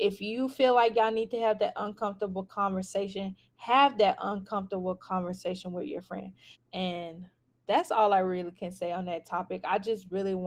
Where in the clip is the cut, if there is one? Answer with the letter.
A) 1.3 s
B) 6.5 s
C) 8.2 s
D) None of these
B